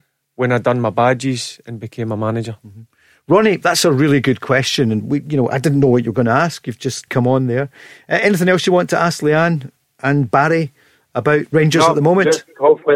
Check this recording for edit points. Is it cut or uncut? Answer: cut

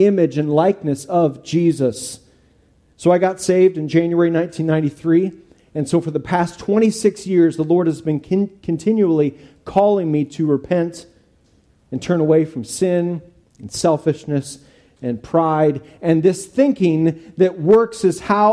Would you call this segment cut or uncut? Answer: uncut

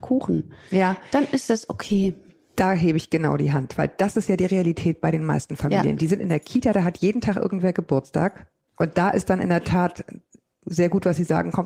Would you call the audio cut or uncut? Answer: cut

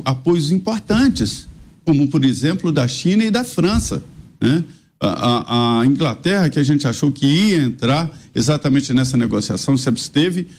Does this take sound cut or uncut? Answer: uncut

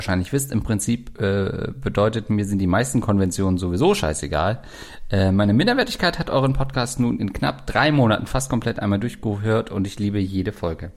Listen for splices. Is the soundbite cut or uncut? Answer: uncut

